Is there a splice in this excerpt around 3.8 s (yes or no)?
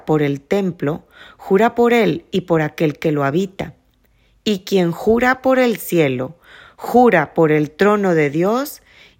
no